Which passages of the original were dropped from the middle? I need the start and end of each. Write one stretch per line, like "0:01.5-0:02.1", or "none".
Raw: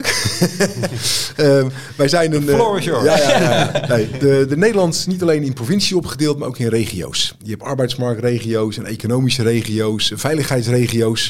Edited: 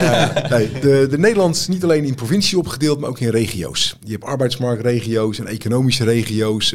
none

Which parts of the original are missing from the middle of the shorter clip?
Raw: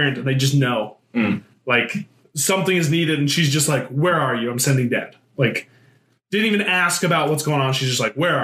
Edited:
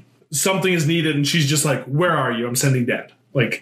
none

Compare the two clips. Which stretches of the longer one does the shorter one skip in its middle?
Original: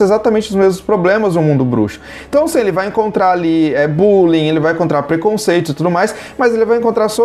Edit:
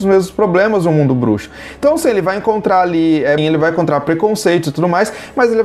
0:03.9-0:04.4

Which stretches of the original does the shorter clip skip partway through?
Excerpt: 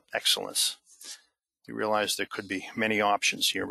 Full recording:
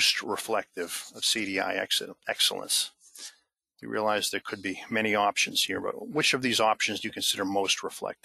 none

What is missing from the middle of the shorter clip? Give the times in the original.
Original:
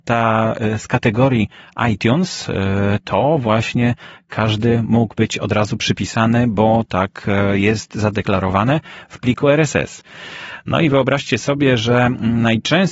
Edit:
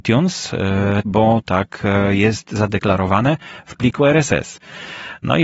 0:03.0-0:06.5

